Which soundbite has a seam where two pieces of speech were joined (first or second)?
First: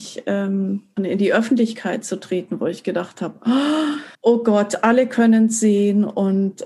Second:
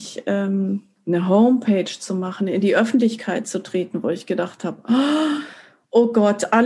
first